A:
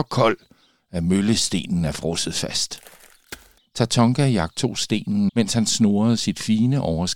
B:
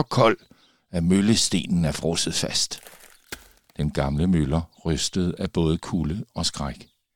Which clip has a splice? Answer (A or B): A